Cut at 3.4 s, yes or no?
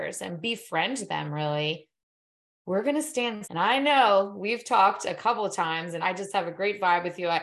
yes